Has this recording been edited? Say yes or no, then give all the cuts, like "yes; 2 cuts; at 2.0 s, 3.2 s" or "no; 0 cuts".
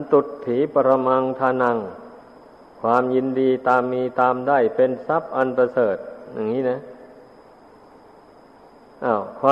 no; 0 cuts